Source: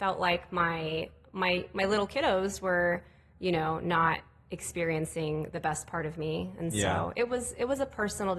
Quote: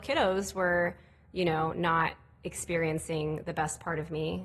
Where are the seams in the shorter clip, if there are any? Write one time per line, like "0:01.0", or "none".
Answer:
none